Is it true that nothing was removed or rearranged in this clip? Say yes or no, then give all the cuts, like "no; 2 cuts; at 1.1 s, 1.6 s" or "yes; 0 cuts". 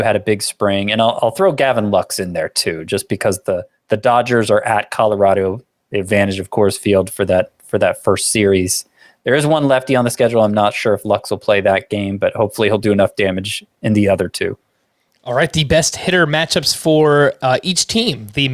yes; 0 cuts